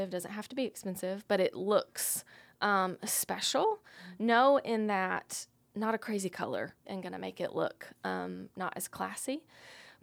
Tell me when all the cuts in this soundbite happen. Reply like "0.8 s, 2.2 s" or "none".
6.9 s